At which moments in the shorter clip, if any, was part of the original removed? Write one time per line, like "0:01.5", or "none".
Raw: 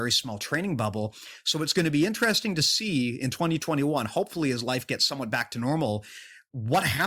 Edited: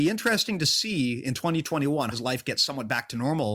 0:02.1